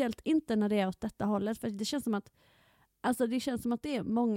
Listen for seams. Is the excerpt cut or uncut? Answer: uncut